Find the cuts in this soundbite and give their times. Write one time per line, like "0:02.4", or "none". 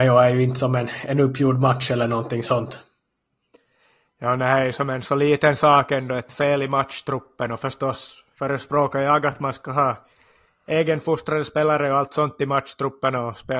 none